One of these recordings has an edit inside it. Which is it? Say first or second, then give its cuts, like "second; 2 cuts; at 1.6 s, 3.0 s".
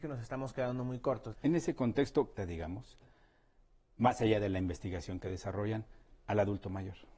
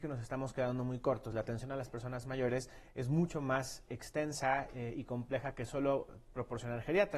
first; 2 cuts; at 1.3 s, 2.4 s